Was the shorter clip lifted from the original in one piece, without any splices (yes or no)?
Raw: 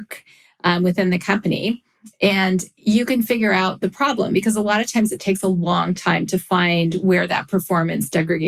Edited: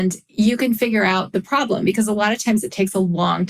yes